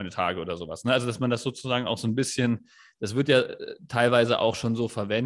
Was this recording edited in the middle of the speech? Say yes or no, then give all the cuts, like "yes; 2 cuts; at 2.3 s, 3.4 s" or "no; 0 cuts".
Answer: no; 0 cuts